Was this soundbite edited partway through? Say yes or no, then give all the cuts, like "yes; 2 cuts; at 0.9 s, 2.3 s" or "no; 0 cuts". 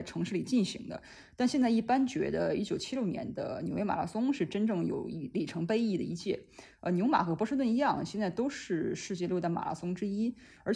no; 0 cuts